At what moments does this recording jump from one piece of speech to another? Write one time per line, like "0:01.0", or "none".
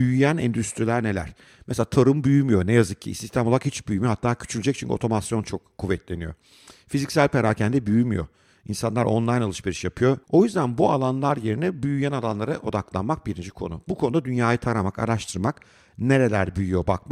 0:10.2